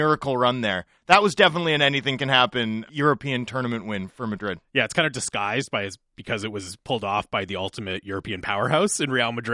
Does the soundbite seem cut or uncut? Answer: cut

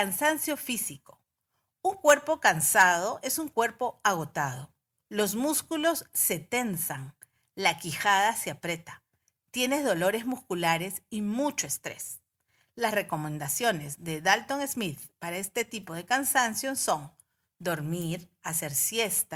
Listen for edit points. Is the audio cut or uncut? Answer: uncut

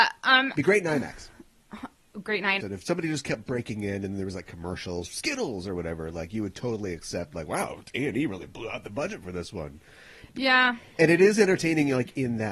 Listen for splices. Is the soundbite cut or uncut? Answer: cut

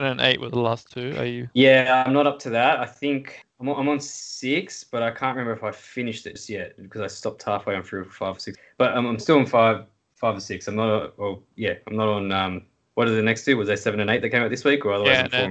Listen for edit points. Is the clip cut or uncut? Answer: cut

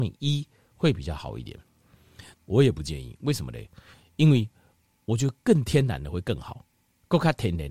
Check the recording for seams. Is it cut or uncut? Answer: cut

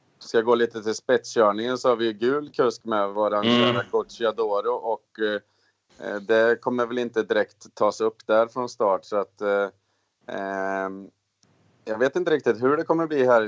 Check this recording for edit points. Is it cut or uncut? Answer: uncut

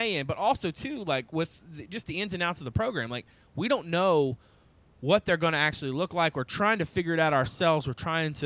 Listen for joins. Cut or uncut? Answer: uncut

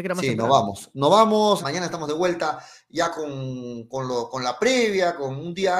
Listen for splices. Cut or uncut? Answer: cut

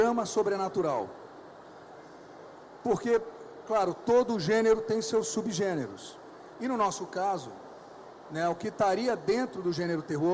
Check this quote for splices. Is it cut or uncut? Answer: uncut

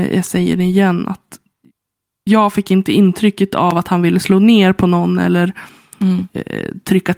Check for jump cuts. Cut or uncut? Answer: uncut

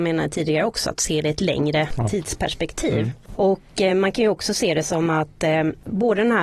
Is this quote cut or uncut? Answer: uncut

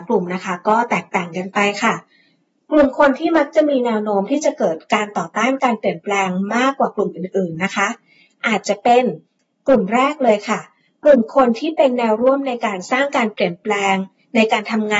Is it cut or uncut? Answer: uncut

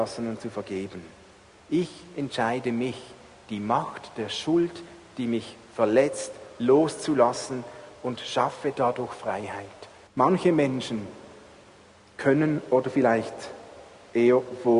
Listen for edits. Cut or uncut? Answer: cut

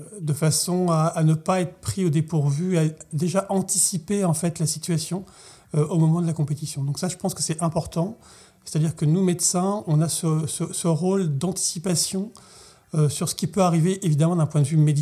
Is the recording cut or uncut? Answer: uncut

